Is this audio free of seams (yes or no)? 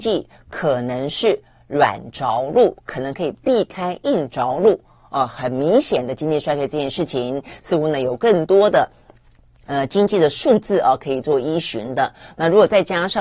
yes